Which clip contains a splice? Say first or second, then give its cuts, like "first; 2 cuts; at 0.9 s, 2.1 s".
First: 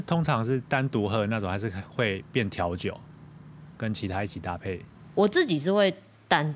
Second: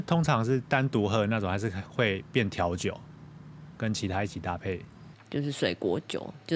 second; 1 cut; at 5.1 s